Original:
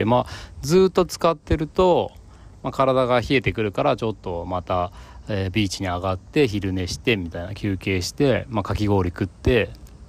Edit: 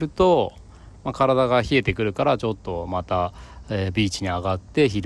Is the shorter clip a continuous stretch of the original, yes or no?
yes